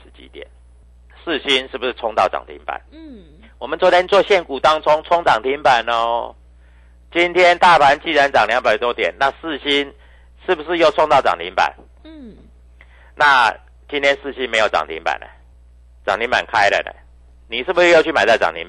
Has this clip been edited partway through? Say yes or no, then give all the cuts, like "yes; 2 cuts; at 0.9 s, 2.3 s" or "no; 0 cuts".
yes; 1 cut; at 12.0 s